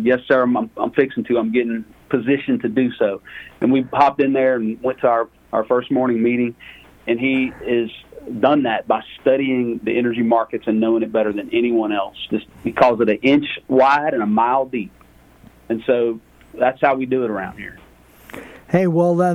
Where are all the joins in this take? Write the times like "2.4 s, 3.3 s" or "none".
7.0 s